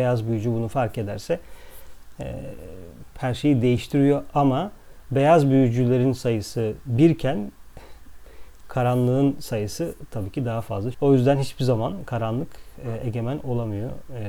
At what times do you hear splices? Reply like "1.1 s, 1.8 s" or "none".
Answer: 10.9 s